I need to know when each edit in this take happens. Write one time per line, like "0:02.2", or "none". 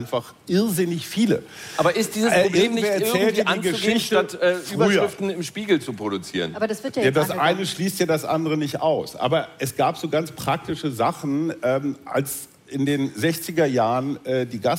none

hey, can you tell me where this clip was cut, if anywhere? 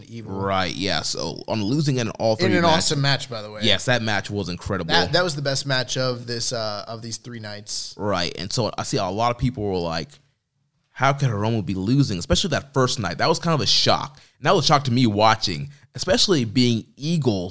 none

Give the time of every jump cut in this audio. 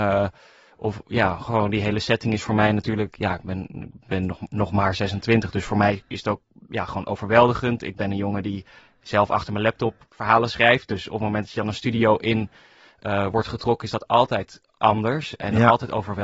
none

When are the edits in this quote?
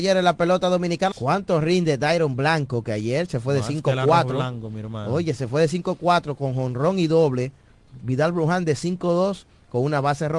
0:01.1
0:08.0

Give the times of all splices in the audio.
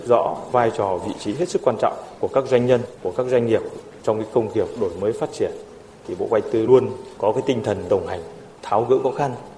0:06.7
0:08.6

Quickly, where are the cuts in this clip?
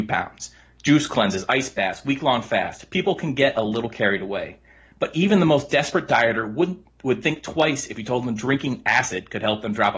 none

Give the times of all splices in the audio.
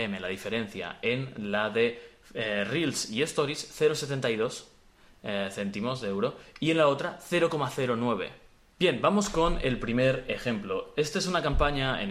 0:08.8

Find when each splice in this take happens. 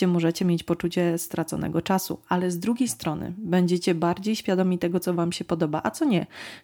none

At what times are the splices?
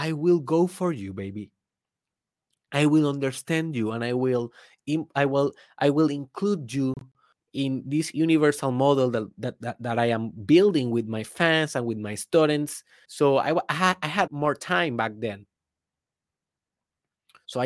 0:13.0
0:14.3

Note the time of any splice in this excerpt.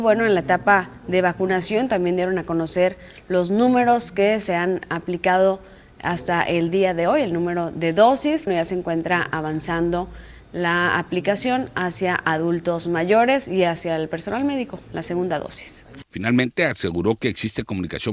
0:08.5
0:16.0

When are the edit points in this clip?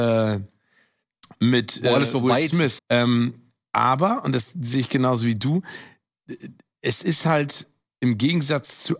0:02.8

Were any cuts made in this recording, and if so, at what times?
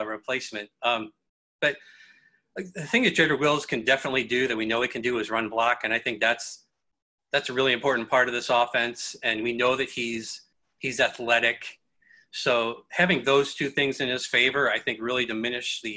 none

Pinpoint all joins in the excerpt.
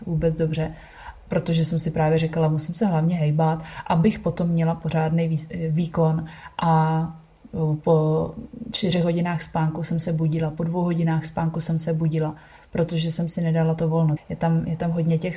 0:14.2

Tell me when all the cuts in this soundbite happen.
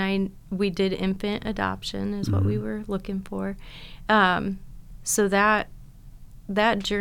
none

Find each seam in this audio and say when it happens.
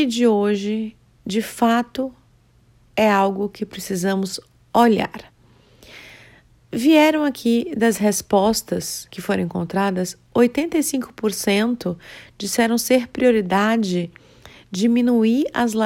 none

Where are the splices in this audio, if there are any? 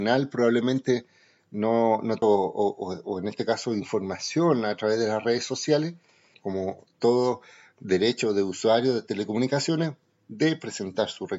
0:02.2
0:06.3

